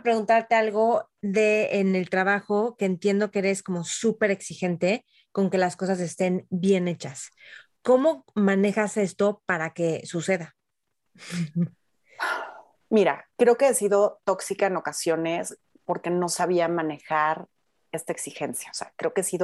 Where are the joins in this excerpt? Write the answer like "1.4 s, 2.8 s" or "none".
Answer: none

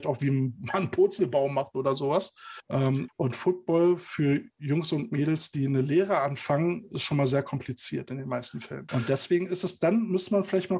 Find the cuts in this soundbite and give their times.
3.1 s, 8.9 s

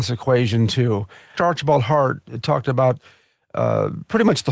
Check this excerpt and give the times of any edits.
1.4 s

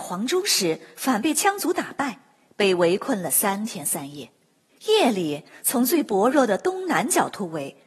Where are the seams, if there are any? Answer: 4.7 s

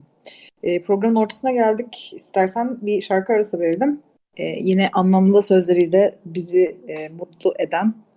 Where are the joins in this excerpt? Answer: none

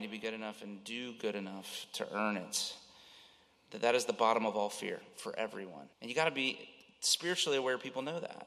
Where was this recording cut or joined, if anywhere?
5.9 s

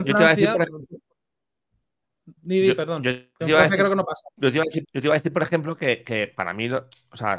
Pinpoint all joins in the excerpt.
2.4 s, 4.8 s

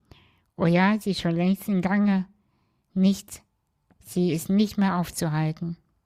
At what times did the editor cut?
none

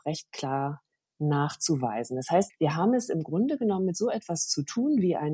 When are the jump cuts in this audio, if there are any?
2.5 s

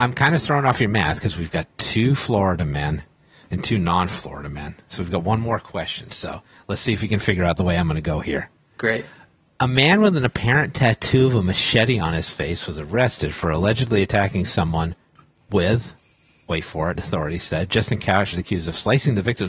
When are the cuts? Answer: 17.0 s, 18.3 s

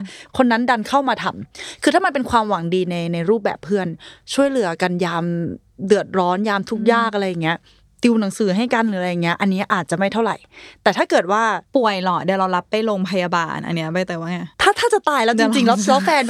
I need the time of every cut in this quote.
11.7 s, 14.5 s

